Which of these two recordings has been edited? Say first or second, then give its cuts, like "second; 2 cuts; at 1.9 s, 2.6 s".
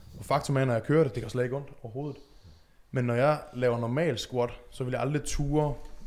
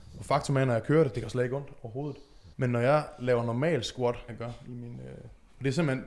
second; 2 cuts; at 2.5 s, 4.3 s